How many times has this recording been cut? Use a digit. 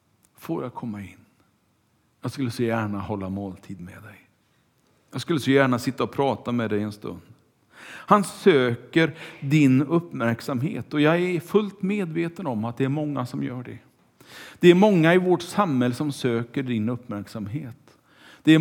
0